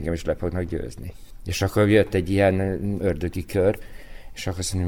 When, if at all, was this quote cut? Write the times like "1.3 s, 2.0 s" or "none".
3.0 s